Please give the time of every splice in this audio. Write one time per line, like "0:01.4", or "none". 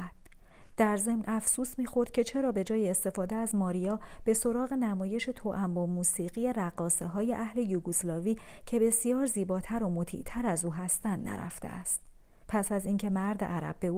0:12.4